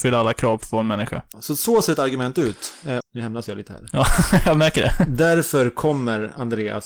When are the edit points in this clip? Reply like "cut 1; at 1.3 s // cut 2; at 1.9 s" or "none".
cut 1; at 1.3 s // cut 2; at 3.0 s